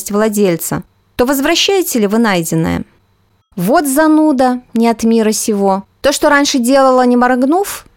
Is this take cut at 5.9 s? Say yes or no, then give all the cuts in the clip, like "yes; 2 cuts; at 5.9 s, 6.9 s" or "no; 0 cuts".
yes; 2 cuts; at 3.4 s, 5.9 s